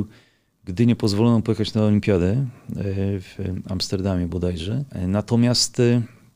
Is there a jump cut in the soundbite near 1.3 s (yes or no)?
no